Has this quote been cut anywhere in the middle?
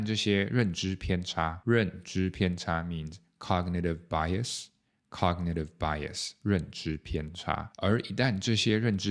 no; 0 cuts

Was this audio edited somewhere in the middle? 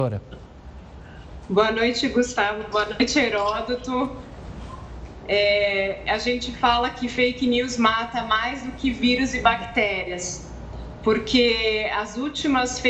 no; 0 cuts

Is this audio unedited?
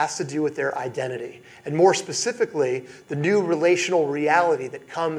yes; 0 cuts

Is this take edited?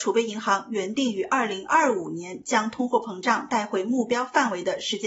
no; 0 cuts

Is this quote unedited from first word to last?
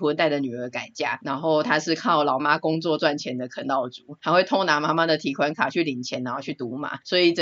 no; 1 cut; at 2.4 s

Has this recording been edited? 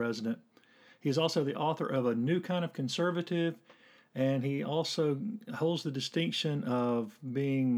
no; 0 cuts

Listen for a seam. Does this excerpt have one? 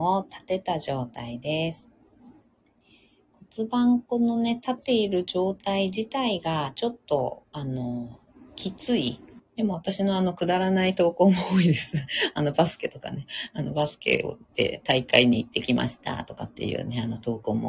yes; 2 cuts; at 4.8 s, 9.4 s

